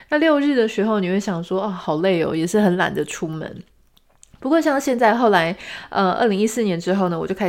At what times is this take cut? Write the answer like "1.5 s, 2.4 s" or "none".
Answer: none